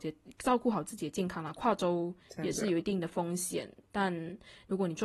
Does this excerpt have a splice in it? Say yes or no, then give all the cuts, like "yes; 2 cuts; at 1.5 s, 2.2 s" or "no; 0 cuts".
no; 0 cuts